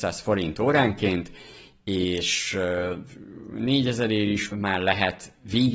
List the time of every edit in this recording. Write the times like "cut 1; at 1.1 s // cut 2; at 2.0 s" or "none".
cut 1; at 4.5 s

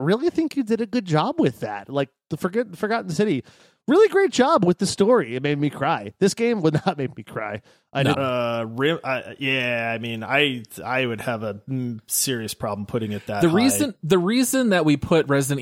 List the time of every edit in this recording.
cut 1; at 8.1 s

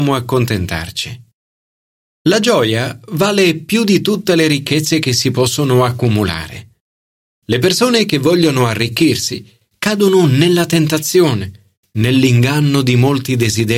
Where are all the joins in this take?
none

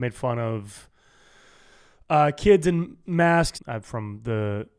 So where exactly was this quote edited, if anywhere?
cut 1; at 3.5 s

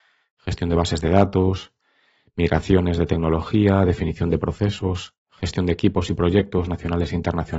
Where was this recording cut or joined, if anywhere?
none

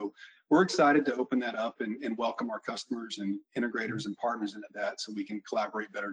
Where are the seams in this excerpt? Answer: none

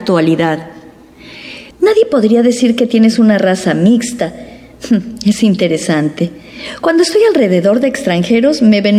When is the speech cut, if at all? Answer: cut 1; at 1.7 s

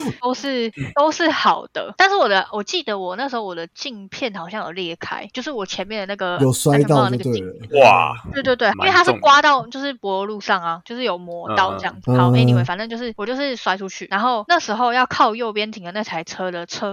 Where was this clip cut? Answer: cut 1; at 8.7 s

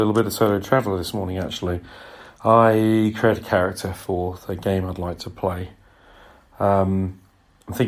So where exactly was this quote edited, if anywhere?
none

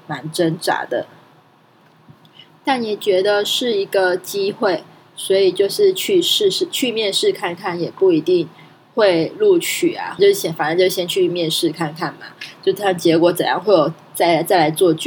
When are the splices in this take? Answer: cut 1; at 10.2 s

